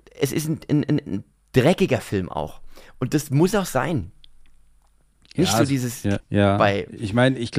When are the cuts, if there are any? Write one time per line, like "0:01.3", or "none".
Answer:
0:06.2